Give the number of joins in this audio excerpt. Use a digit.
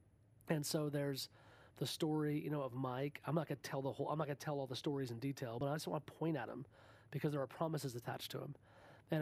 0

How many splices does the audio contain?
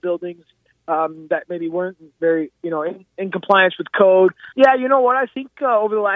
1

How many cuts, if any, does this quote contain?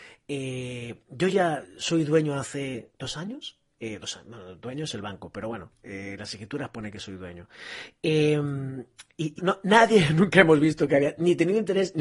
2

